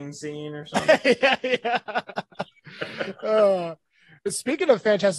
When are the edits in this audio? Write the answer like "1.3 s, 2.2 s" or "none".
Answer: none